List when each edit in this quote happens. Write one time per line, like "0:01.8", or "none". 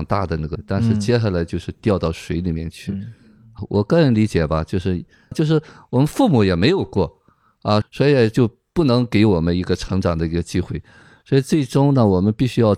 0:05.3
0:07.8